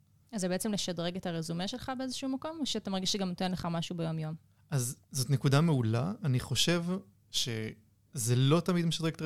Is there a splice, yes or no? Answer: yes